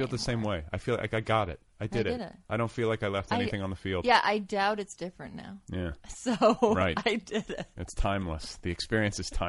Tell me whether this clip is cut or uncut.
uncut